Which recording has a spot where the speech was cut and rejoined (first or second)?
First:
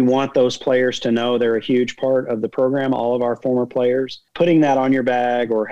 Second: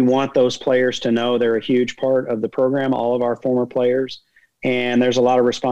first